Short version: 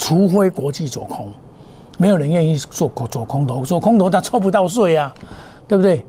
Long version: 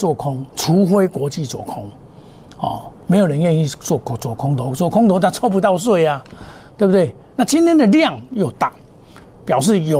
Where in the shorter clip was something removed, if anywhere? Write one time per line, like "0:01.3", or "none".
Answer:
0:02.0